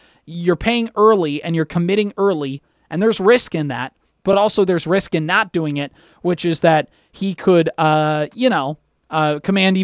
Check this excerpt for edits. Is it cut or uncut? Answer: uncut